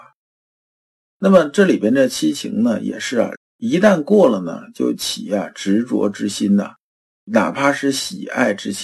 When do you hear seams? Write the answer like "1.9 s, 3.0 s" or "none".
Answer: 1.1 s, 3.3 s